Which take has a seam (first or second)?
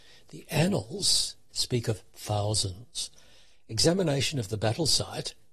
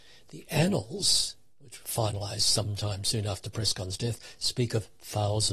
first